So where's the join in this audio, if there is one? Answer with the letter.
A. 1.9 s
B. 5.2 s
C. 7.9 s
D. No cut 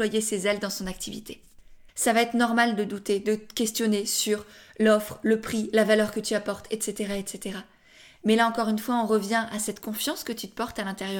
A